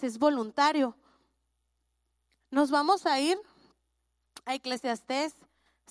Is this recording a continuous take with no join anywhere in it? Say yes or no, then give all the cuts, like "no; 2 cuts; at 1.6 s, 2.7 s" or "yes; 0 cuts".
yes; 0 cuts